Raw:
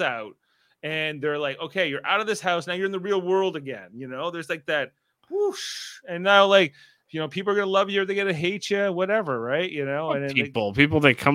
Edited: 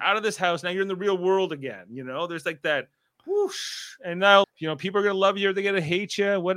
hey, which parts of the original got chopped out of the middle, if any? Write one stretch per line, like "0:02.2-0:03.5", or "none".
0:06.5-0:07.0